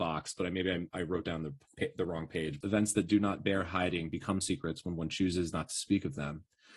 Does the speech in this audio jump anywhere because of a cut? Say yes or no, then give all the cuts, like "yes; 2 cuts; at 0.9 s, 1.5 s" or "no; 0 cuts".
yes; 1 cut; at 2.6 s